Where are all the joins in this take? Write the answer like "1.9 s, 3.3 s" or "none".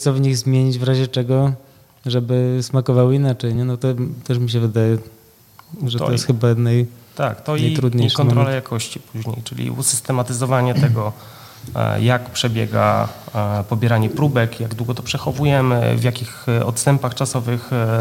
none